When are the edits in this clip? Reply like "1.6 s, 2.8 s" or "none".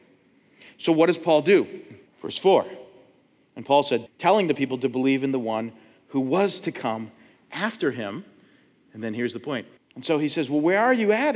2.1 s, 4.1 s, 9.8 s